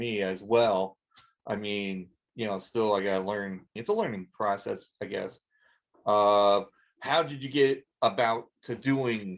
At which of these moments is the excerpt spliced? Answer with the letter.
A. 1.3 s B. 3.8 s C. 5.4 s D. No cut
B